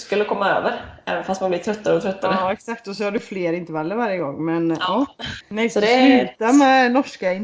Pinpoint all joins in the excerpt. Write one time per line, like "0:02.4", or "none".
0:05.4